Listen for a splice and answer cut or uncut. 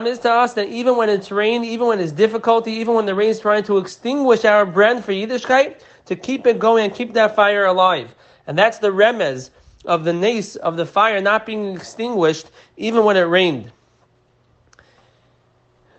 uncut